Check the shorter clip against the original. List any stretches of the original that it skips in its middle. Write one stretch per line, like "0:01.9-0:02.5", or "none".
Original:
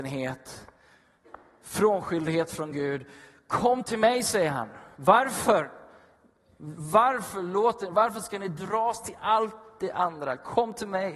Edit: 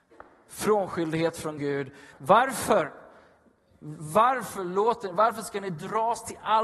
0:03.3-0:04.9